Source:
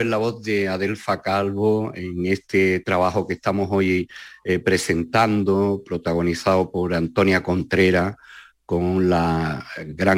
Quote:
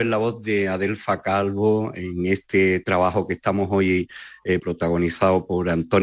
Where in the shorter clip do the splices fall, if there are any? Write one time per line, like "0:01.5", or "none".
0:04.6